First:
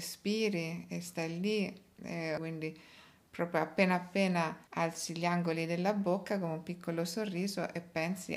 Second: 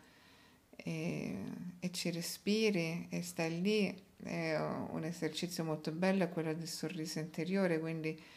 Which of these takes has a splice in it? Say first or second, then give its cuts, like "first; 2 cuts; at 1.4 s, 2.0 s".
first; 2 cuts; at 2.4 s, 4.7 s